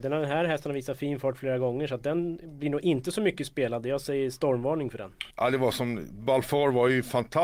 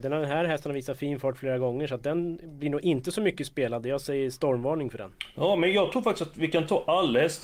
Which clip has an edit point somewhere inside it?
first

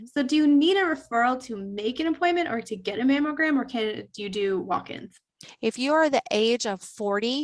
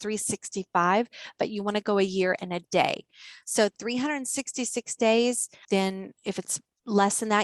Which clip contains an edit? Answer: second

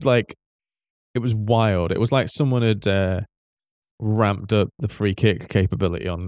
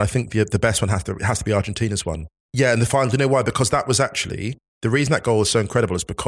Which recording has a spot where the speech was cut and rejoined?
second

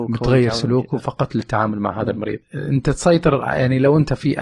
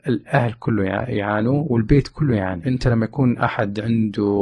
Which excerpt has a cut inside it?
second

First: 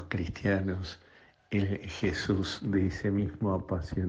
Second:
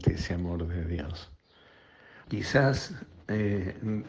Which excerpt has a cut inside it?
second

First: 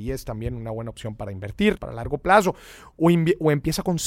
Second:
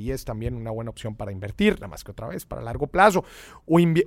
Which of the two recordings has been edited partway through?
first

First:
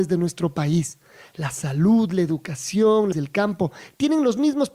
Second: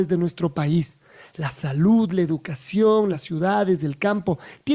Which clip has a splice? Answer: first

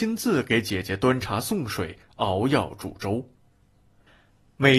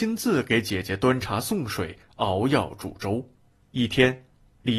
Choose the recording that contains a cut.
second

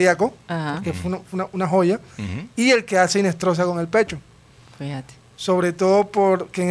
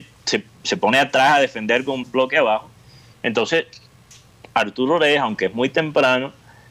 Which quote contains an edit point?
second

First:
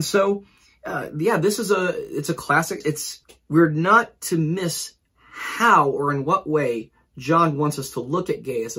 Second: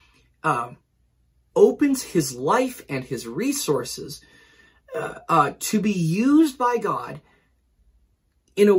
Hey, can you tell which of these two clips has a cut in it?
first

